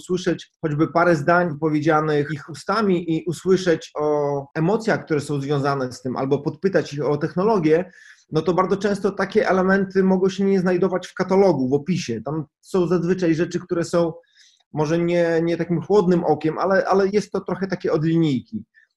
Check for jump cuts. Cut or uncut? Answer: cut